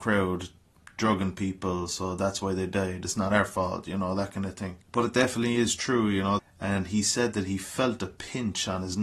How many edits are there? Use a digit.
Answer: 2